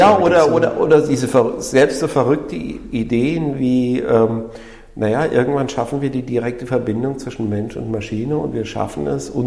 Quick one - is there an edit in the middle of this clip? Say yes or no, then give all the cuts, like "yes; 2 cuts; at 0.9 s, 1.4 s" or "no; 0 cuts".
no; 0 cuts